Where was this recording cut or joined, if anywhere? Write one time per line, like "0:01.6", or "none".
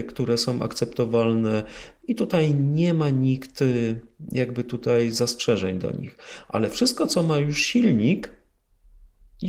none